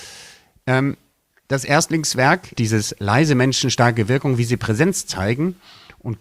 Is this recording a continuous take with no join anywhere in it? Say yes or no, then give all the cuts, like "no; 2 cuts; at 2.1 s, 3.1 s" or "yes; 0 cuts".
no; 1 cut; at 2.6 s